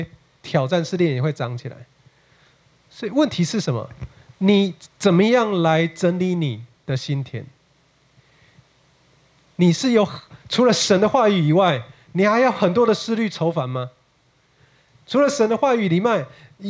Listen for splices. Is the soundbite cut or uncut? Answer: uncut